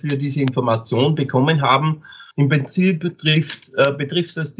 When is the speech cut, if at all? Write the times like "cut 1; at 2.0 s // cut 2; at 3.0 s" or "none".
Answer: cut 1; at 2.3 s